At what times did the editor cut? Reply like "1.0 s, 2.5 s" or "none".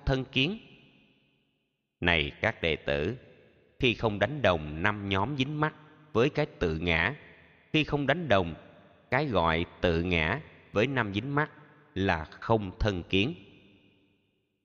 none